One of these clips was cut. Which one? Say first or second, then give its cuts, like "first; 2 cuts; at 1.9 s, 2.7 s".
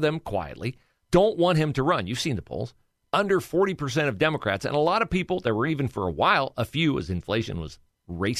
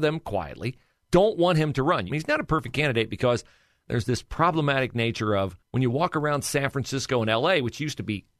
second; 2 cuts; at 2.1 s, 5.6 s